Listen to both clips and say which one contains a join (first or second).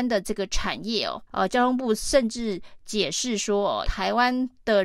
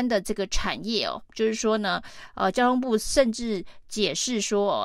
first